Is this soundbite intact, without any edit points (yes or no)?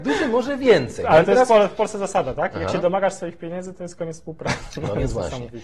yes